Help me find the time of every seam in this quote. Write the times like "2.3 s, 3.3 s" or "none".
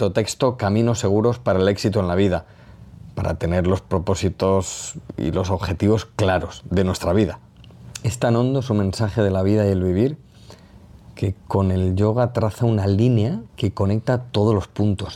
13.5 s